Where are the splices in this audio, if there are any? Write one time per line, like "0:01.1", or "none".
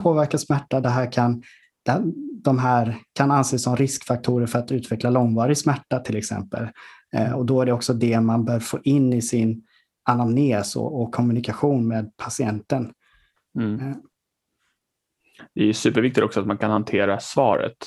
none